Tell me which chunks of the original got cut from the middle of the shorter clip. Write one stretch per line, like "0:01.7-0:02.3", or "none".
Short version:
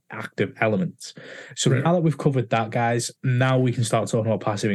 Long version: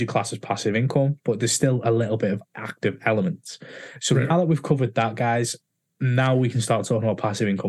0:05.6-0:05.9